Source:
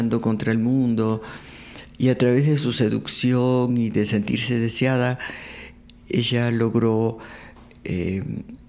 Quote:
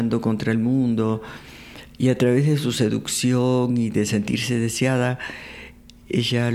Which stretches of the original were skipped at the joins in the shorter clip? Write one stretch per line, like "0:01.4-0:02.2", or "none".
none